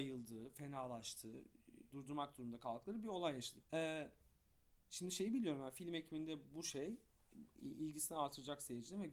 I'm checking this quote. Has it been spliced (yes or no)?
yes